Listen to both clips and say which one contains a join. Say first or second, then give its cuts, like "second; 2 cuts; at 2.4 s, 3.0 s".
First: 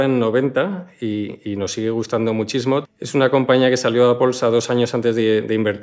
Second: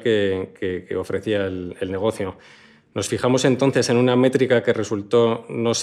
first; 1 cut; at 2.8 s